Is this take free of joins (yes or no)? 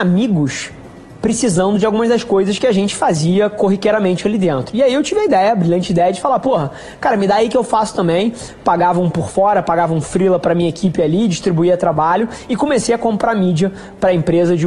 yes